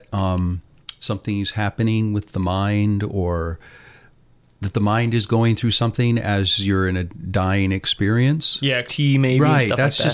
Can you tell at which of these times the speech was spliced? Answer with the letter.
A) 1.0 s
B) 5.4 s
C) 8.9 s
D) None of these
C